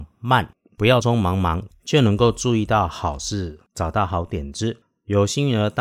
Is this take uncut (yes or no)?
no